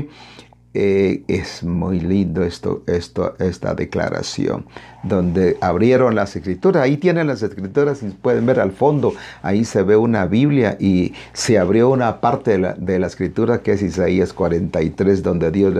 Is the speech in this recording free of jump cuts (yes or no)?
yes